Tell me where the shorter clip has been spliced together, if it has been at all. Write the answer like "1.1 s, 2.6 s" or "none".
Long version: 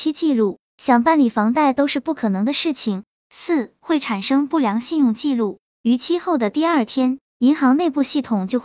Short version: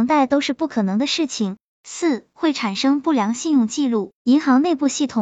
4.2 s